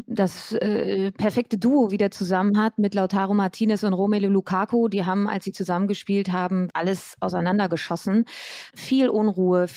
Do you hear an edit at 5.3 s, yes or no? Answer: no